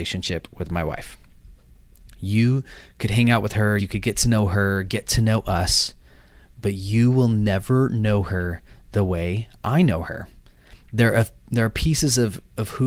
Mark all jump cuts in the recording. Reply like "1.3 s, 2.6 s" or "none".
3.8 s